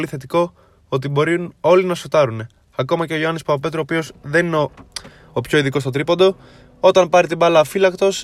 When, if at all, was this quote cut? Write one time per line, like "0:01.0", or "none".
none